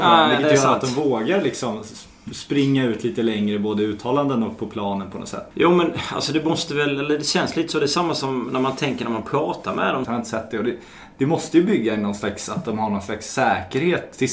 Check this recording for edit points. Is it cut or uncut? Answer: cut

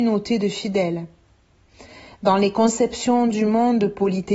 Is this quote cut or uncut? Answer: uncut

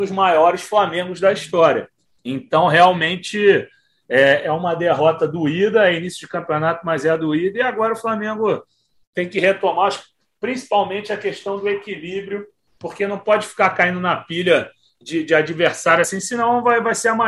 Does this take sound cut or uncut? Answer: uncut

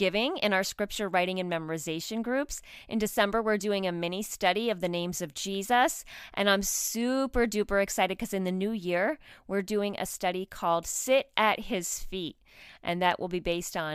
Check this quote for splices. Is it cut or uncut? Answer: uncut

